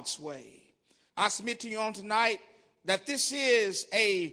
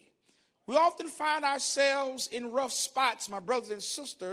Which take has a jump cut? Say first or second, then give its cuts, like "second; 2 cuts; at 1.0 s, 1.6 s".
first; 1 cut; at 1.1 s